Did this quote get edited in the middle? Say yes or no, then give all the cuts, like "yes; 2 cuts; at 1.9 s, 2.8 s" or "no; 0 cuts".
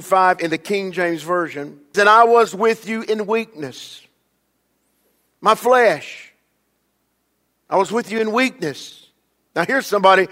yes; 1 cut; at 1.9 s